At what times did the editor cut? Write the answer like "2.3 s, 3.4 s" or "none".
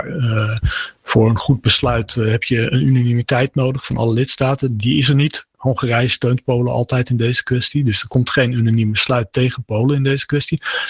none